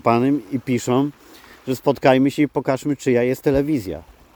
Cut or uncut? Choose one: uncut